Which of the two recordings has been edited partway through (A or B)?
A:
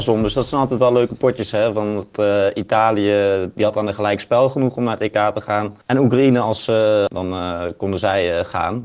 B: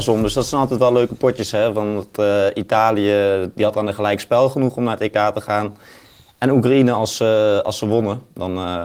A